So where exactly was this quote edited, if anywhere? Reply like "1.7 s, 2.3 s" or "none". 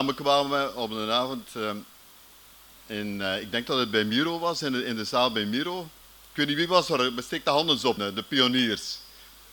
8.0 s